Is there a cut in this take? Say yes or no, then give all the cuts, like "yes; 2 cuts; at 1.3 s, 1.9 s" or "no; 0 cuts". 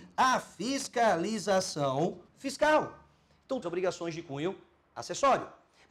yes; 2 cuts; at 2.3 s, 3.6 s